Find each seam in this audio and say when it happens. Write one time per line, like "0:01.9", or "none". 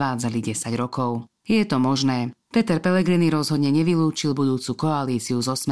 none